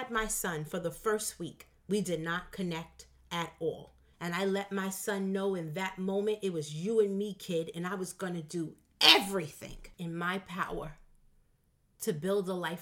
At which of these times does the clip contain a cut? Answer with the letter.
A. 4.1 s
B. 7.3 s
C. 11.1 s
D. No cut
A